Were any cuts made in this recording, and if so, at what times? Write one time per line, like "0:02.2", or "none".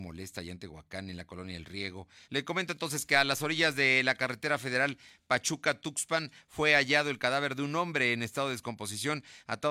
0:02.2